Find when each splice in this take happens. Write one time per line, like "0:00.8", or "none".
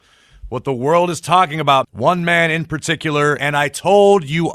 0:01.8
0:03.4